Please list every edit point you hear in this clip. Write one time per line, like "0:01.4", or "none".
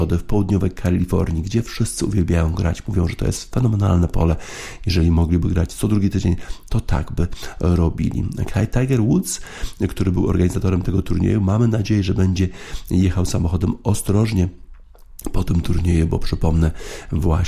none